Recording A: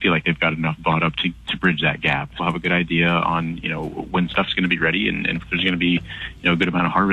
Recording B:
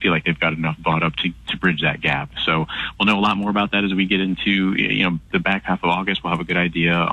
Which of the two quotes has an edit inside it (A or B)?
A